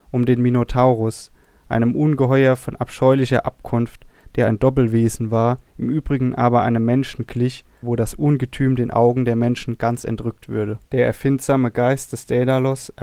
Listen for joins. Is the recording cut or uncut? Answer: cut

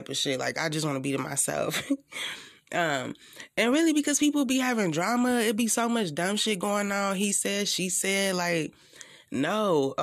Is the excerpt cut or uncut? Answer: uncut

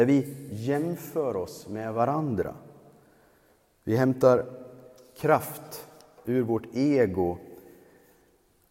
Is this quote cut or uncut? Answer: uncut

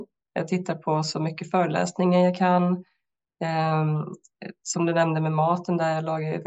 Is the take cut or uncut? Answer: uncut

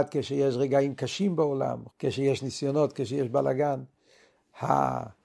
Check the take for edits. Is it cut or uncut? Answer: cut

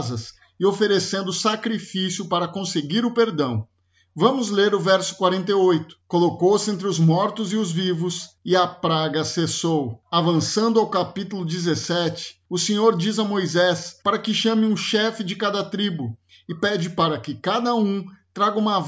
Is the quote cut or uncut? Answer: uncut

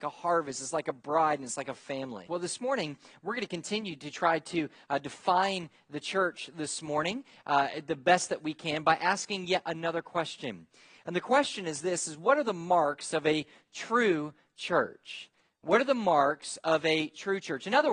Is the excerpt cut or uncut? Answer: cut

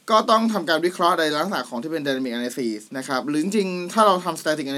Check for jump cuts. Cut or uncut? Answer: cut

